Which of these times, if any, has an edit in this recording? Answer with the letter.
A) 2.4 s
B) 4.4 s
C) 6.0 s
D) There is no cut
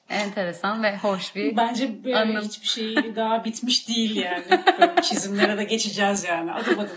D